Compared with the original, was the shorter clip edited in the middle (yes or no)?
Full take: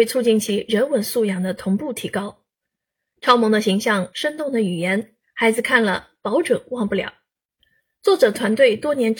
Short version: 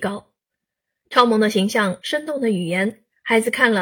no